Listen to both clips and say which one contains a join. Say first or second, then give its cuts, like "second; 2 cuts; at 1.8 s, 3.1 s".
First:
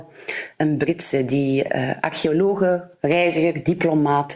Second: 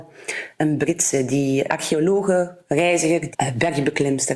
second; 2 cuts; at 1.7 s, 3.3 s